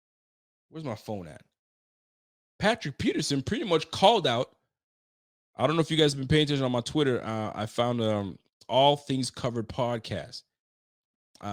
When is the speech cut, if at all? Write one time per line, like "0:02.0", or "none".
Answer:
none